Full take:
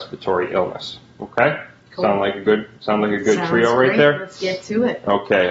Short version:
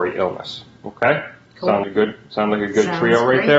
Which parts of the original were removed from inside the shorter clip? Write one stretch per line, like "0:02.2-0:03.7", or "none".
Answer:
0:02.2-0:02.3